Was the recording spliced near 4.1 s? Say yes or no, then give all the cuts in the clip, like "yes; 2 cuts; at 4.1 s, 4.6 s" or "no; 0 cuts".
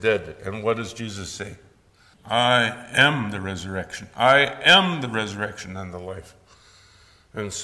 no; 1 cut; at 2.1 s